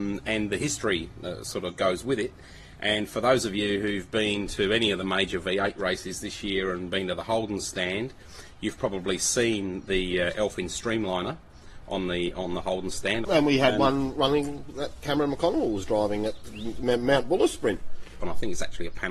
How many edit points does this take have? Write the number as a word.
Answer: two